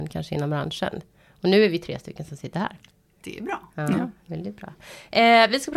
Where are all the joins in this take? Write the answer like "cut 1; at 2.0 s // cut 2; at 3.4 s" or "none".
none